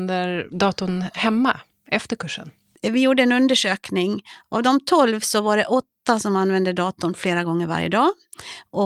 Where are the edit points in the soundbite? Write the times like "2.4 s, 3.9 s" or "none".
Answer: none